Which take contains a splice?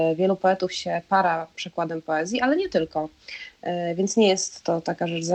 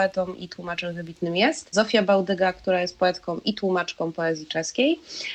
second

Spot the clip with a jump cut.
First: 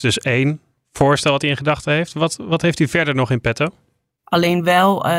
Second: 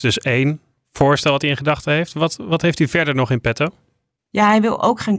first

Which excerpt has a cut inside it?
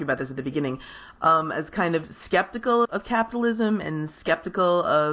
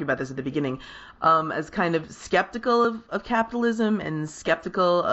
first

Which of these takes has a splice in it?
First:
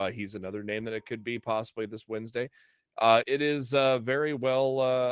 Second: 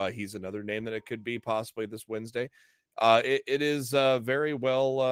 first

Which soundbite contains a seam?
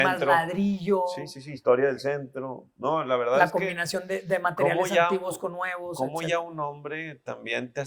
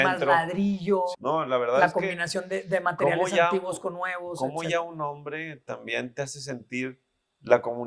second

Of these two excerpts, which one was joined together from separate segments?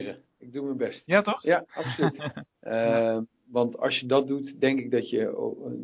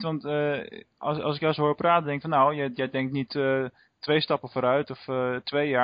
first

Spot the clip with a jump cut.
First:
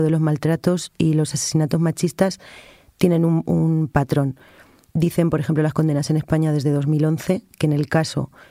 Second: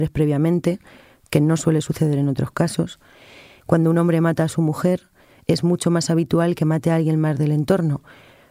second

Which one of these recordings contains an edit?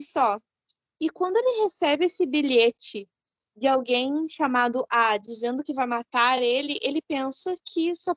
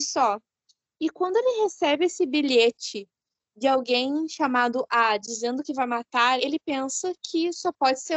second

